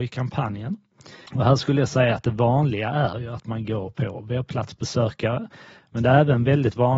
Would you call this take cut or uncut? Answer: cut